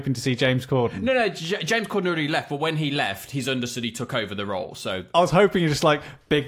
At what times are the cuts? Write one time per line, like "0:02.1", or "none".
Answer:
0:05.1